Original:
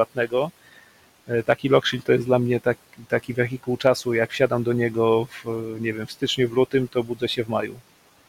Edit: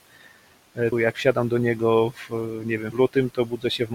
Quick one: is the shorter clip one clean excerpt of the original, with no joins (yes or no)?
no